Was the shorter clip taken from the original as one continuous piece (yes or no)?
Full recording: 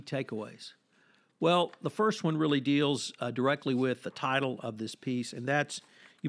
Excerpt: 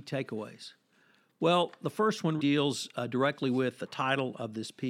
no